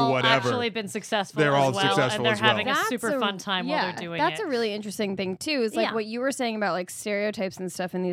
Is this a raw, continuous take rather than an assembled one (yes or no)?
yes